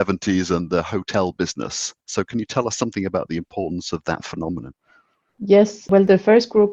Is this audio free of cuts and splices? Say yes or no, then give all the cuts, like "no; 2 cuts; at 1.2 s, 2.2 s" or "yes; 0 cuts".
yes; 0 cuts